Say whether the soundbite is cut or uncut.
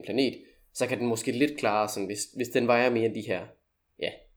uncut